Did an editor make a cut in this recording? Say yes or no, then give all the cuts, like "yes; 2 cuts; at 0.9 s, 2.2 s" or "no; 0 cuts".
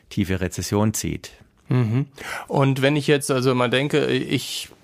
no; 0 cuts